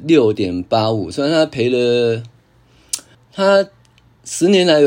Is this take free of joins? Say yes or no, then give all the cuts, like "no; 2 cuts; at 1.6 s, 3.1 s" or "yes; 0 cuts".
no; 1 cut; at 3.1 s